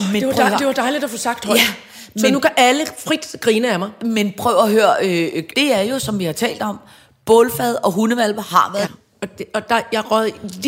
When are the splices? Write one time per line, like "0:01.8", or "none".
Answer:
0:05.5
0:08.9